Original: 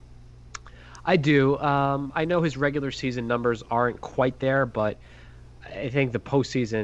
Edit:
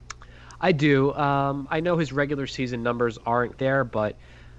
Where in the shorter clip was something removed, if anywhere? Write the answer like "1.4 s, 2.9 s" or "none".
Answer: 3.6 s